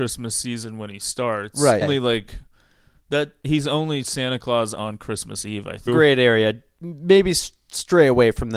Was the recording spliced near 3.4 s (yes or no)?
no